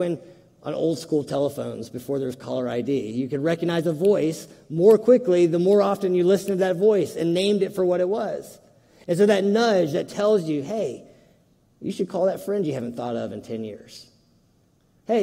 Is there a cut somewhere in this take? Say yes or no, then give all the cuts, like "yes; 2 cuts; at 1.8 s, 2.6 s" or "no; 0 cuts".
no; 0 cuts